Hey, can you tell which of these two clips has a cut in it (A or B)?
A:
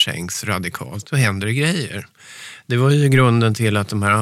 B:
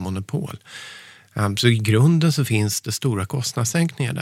A